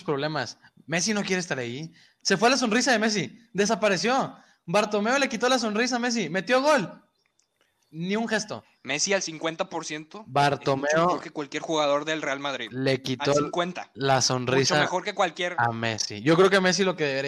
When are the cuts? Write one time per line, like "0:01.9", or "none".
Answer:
0:02.2